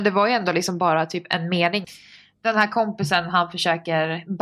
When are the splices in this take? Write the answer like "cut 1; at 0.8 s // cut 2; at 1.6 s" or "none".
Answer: cut 1; at 1.8 s